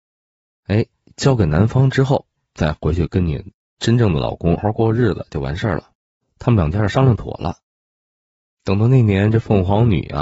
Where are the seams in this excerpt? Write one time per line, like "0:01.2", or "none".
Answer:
0:04.6
0:06.2